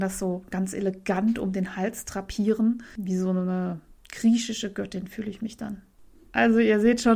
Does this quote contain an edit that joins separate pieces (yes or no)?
no